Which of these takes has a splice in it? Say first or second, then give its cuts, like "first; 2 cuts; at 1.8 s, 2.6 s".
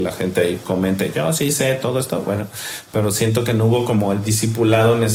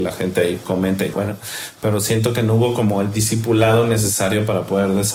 second; 1 cut; at 1.1 s